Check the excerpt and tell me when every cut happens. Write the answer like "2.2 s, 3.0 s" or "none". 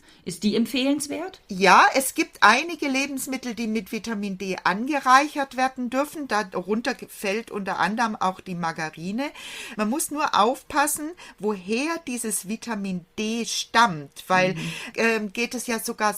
9.7 s, 14.9 s